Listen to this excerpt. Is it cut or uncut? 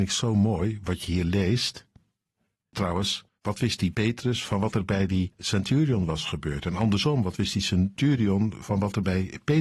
cut